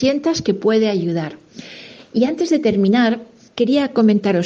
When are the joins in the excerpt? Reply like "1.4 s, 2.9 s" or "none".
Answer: none